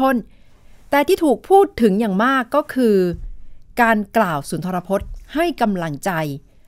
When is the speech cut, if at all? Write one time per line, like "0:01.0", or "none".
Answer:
none